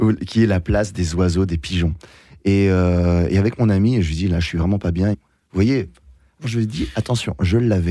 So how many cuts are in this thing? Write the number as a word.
two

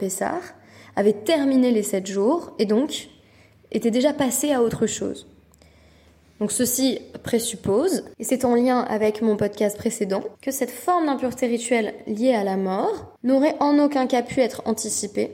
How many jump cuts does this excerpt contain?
three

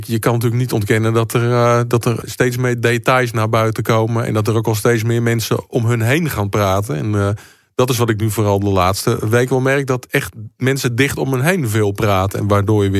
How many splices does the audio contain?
one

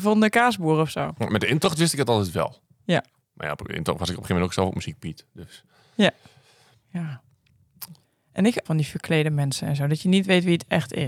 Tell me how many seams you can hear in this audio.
one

